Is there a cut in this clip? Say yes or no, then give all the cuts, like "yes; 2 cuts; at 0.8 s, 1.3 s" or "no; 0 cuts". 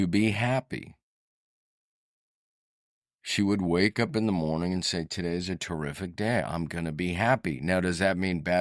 no; 0 cuts